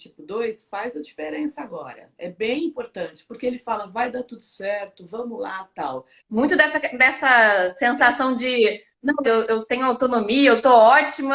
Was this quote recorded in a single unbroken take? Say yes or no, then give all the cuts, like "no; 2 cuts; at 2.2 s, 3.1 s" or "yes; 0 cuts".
no; 3 cuts; at 2.1 s, 6.2 s, 9.2 s